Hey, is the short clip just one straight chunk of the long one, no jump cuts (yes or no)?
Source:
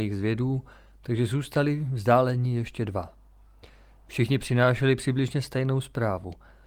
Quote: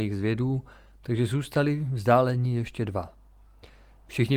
yes